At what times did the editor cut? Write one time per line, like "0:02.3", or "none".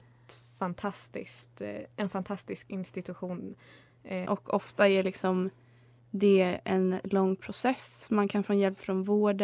0:04.3